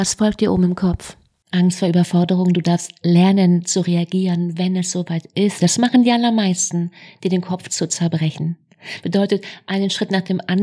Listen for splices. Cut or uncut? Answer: cut